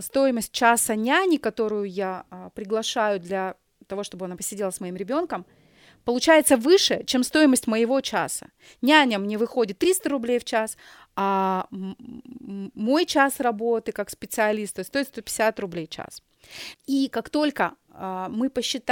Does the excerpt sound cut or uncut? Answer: cut